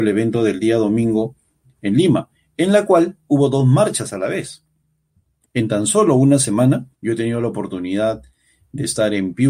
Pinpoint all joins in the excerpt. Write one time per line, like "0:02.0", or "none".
0:05.4
0:06.9